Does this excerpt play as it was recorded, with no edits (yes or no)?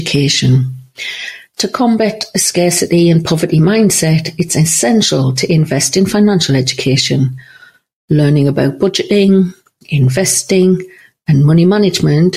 yes